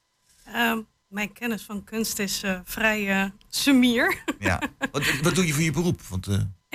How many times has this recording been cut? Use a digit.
0